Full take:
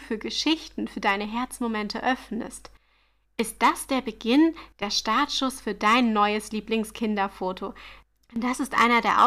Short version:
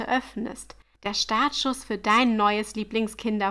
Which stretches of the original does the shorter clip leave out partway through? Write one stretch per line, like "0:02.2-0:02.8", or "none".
0:02.9-0:04.7